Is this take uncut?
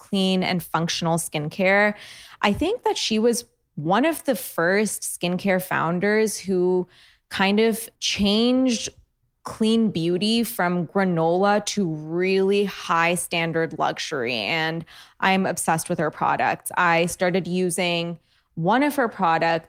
no; 1 cut; at 7.9 s

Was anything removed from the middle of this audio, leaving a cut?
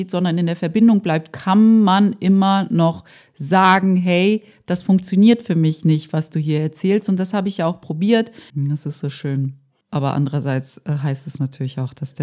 yes; 1 cut; at 8.5 s

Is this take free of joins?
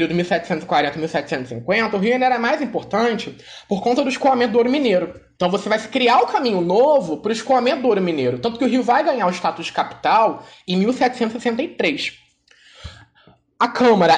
yes; 0 cuts

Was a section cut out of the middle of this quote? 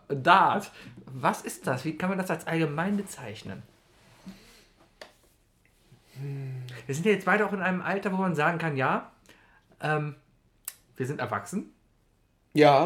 no; 0 cuts

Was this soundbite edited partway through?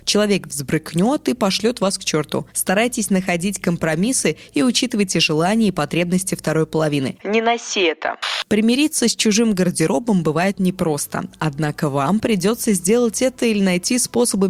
yes; 1 cut; at 7.2 s

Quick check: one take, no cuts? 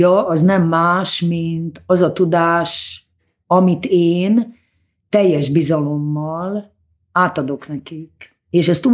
yes; 0 cuts

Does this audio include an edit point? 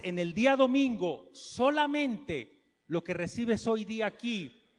no; 0 cuts

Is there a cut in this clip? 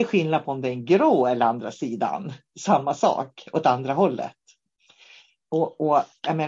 no; 0 cuts

